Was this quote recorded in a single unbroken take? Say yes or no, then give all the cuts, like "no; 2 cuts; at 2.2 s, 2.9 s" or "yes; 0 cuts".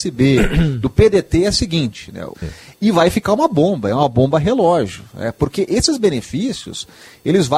no; 1 cut; at 2.3 s